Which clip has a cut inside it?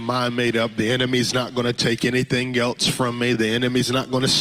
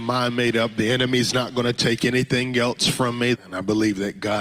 second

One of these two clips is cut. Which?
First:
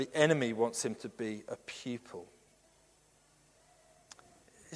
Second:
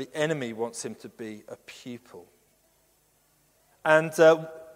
second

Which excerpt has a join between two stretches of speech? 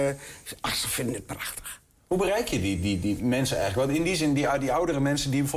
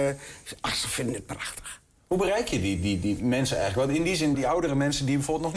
second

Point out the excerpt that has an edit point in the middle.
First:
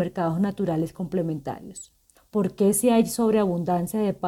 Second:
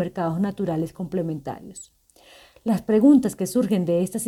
first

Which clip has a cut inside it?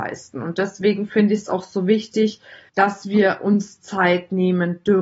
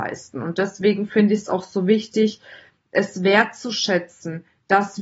first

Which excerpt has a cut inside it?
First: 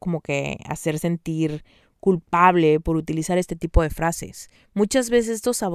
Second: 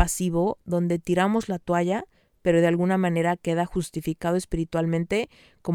first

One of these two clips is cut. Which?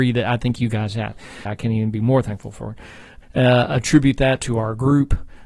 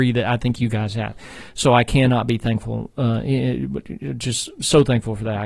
first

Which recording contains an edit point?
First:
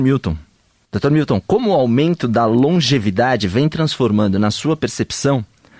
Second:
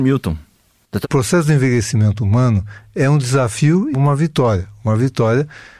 second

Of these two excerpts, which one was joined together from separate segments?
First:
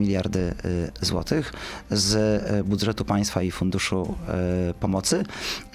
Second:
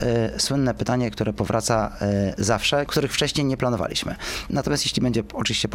second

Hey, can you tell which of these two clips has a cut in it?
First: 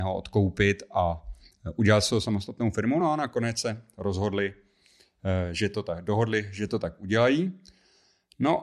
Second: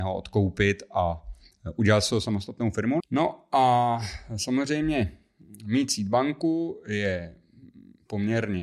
second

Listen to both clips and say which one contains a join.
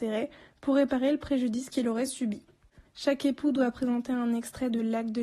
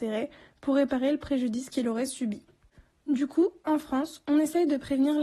first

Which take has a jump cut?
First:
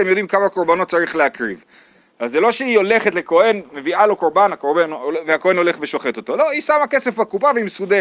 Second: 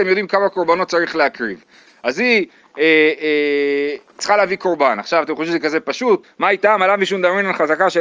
second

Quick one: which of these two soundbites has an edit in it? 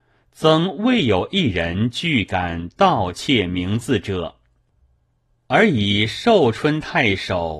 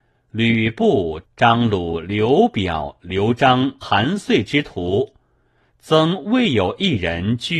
second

